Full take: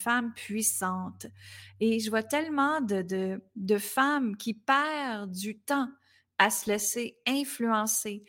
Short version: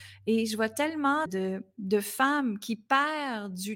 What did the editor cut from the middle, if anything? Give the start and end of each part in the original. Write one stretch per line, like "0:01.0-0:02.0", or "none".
0:02.8-0:03.0

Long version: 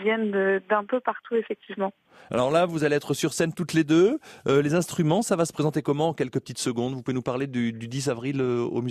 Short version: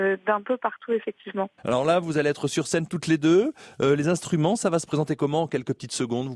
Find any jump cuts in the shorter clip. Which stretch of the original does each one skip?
0:02.0-0:02.2

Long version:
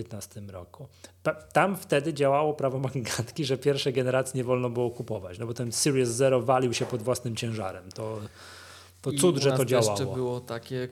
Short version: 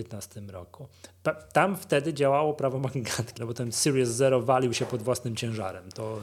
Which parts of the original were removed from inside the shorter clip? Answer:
0:03.4-0:05.4

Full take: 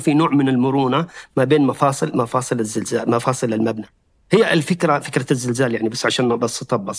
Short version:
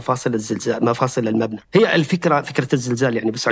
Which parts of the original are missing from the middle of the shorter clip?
0:03.9-0:04.2

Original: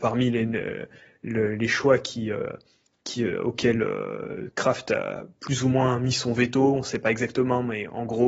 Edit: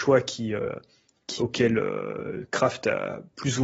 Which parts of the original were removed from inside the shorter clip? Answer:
0:03.1-0:03.4

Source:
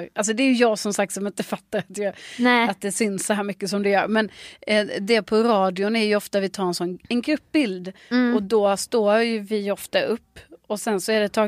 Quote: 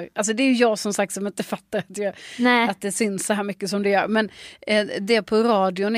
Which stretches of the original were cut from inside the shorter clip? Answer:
none

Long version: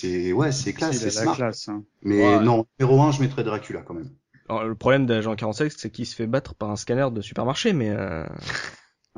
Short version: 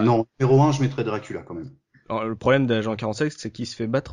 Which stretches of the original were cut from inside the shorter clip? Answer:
none

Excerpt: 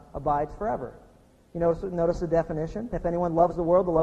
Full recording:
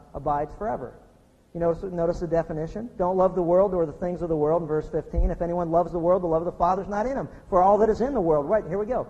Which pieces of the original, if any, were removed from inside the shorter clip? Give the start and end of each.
0:02.9-0:05.3

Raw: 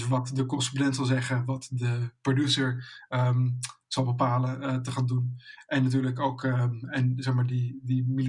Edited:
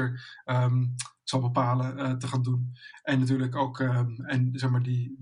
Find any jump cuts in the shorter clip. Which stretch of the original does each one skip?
none

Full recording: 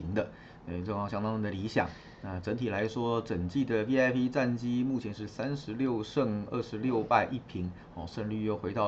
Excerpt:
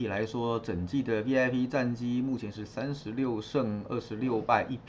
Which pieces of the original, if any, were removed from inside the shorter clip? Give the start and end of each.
none

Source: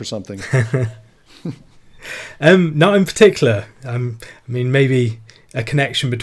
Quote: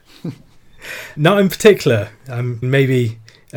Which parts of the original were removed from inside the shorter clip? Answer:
0:02.4-0:02.7
0:04.2-0:04.6

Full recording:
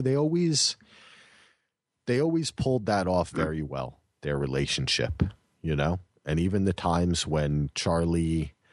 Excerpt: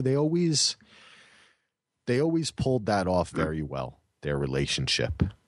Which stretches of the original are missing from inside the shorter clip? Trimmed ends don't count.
none

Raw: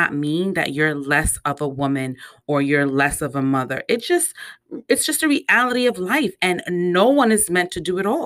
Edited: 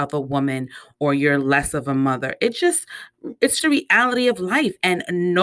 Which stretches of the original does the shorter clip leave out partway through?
0:05.1-0:05.2

